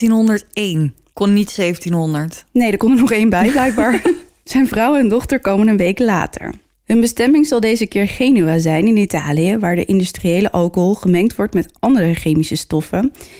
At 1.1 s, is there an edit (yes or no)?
yes